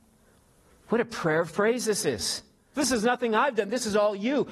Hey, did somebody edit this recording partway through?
yes; 1 cut; at 2.7 s

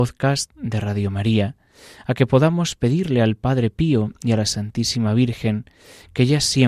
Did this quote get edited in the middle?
no; 0 cuts

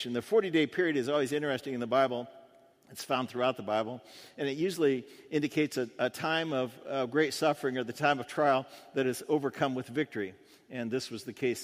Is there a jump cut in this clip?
no; 0 cuts

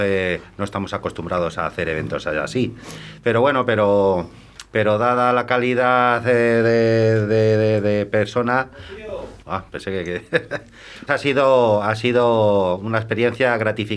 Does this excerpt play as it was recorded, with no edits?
no; 2 cuts; at 9.4 s, 11.1 s

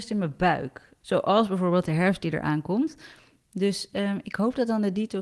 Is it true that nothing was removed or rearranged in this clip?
no; 1 cut; at 1.0 s

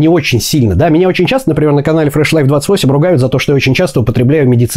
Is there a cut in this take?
no; 0 cuts

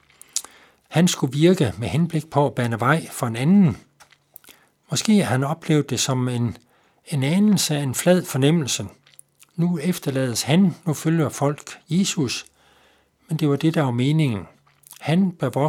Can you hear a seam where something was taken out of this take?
no; 0 cuts

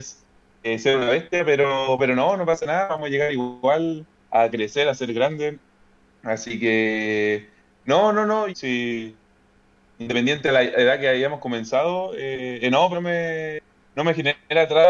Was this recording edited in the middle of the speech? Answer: yes; 2 cuts; at 8.5 s, 12.9 s

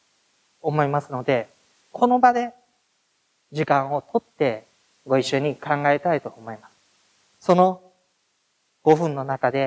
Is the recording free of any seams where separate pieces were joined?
no; 1 cut; at 7.4 s

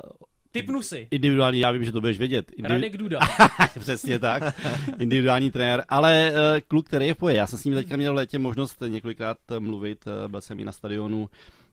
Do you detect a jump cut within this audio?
no; 0 cuts

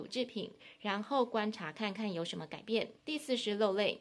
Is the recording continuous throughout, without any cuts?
no; 1 cut; at 3.0 s

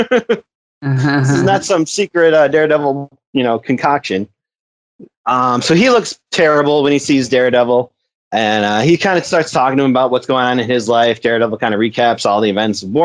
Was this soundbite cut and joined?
yes; 1 cut; at 5.1 s

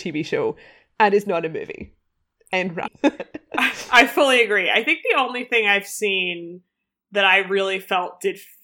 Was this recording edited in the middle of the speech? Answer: yes; 1 cut; at 2.9 s

